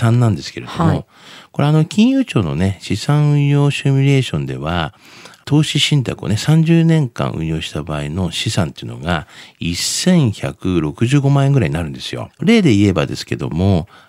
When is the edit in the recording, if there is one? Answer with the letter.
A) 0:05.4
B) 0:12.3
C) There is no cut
B